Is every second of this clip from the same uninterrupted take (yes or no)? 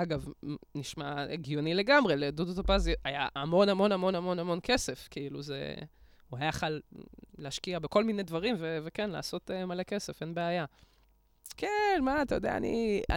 no